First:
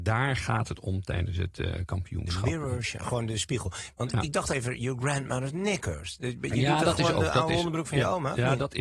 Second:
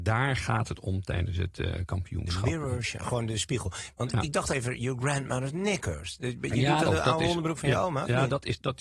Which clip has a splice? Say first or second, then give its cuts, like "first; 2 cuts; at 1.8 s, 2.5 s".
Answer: second; 1 cut; at 6.8 s